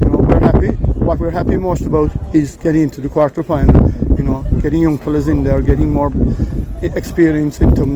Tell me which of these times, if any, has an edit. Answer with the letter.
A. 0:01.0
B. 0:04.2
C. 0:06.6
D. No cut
B